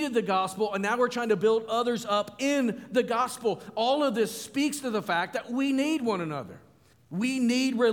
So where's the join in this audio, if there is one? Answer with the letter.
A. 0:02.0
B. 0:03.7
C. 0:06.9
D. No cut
C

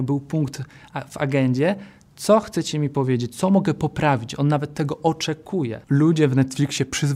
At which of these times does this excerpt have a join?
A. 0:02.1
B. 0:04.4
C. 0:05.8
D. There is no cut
D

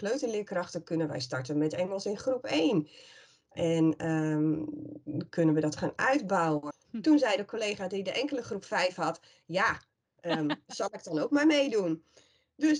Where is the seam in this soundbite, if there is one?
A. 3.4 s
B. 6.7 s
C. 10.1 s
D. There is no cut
B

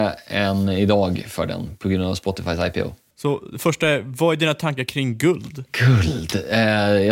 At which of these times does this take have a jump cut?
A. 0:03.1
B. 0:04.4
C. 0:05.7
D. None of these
A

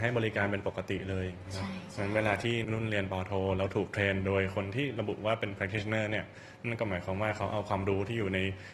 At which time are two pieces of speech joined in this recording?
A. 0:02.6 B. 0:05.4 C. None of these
A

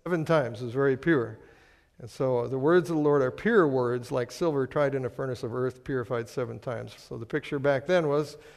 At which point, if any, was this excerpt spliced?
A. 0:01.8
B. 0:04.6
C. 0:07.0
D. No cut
C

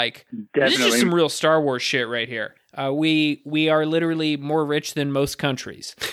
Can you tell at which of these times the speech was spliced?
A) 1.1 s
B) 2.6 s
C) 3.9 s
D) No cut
B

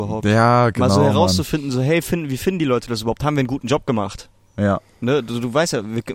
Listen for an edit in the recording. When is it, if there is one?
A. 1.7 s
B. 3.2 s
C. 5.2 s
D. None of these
D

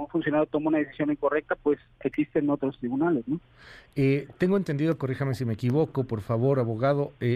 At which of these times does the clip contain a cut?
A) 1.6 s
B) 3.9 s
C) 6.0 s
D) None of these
D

